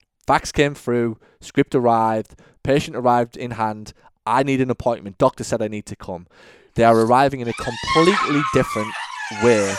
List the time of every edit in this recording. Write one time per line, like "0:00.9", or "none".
0:06.7